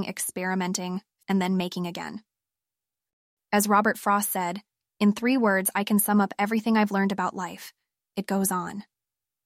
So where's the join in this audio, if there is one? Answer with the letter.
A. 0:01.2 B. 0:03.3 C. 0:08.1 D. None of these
A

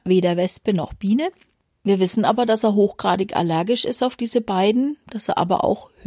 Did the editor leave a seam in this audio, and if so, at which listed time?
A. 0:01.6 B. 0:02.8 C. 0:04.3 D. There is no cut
D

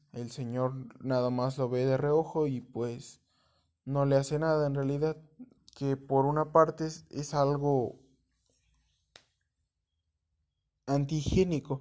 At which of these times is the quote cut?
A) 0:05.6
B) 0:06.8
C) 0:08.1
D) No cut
A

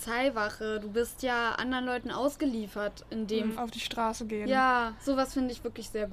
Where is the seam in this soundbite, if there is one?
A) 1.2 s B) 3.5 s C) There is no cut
B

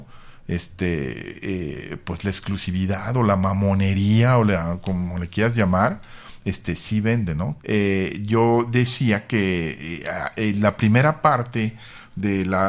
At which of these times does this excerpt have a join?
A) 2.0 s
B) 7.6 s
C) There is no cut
B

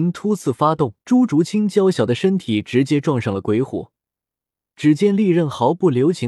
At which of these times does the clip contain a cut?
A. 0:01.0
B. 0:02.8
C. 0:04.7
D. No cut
A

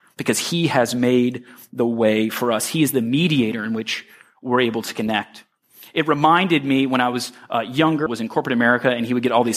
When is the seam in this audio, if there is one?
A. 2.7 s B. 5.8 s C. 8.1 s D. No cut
C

